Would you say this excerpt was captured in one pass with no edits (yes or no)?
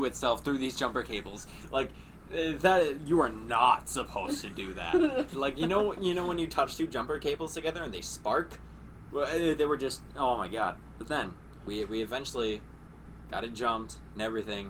no